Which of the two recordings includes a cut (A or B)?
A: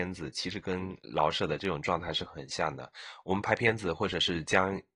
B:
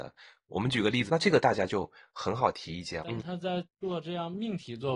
B